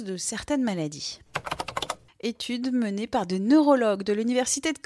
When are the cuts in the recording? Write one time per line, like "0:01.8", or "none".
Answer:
0:02.1